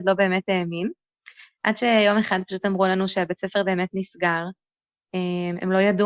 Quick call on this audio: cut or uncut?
uncut